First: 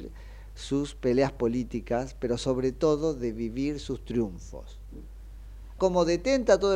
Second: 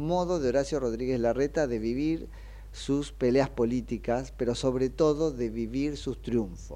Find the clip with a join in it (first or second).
first